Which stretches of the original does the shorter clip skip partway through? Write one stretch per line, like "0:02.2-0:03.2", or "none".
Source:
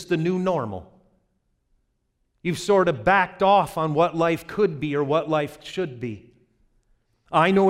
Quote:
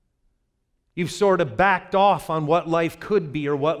none